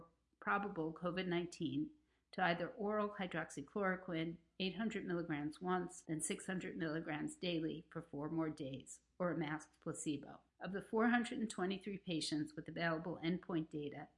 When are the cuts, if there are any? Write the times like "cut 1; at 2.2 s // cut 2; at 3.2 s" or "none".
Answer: cut 1; at 6.0 s // cut 2; at 10.5 s